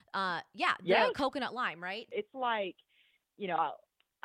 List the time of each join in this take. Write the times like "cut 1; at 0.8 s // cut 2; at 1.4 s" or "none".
cut 1; at 2.1 s